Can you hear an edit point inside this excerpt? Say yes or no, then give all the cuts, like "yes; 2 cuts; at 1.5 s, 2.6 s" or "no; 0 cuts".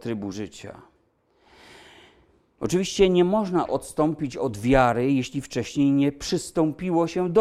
no; 0 cuts